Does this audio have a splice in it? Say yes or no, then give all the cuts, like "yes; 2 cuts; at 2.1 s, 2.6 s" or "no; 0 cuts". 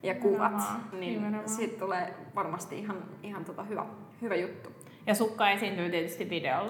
no; 0 cuts